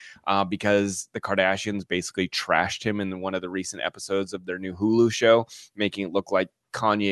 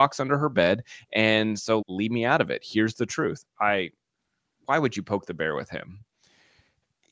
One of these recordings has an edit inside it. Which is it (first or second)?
second